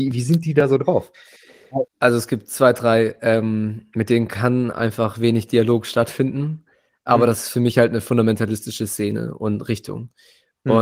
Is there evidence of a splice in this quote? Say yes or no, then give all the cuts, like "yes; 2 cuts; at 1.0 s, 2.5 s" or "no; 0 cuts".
yes; 1 cut; at 1.9 s